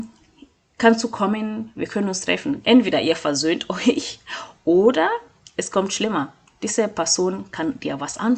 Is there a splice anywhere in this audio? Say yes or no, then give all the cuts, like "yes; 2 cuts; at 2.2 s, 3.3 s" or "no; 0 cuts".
yes; 1 cut; at 2.6 s